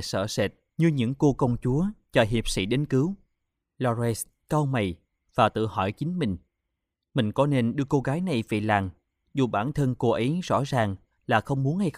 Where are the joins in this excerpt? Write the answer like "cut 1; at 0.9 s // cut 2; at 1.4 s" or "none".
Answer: none